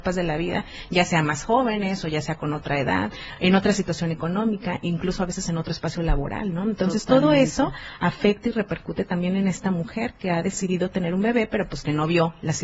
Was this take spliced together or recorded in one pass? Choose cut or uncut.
uncut